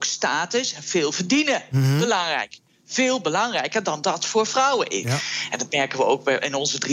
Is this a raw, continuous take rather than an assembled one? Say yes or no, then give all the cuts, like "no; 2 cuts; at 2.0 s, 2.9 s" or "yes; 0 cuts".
no; 2 cuts; at 4.0 s, 5.0 s